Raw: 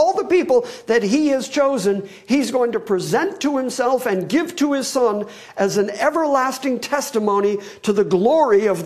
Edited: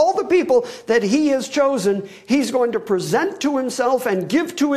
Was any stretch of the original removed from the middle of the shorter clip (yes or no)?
no